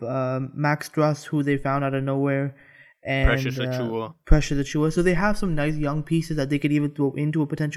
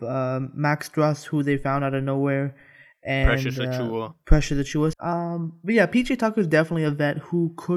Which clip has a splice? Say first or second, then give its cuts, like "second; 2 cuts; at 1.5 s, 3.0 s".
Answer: second; 1 cut; at 4.9 s